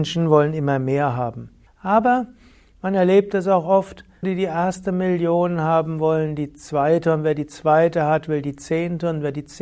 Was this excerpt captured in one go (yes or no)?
no